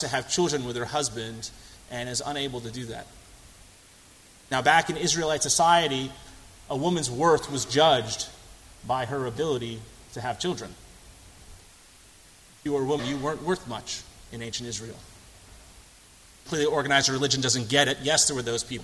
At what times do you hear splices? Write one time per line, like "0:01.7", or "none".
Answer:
0:13.0
0:16.5